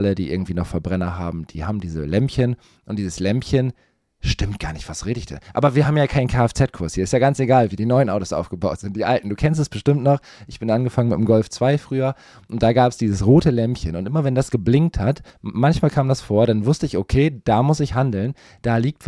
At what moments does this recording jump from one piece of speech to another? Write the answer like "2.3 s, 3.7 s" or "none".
15.3 s